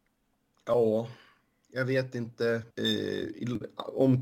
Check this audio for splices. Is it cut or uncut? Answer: cut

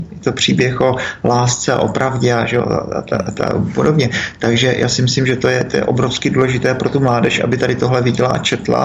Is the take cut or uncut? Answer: uncut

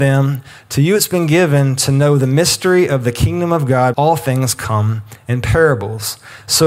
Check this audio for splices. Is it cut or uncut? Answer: cut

